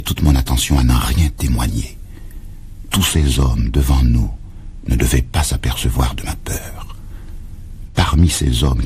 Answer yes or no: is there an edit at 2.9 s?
no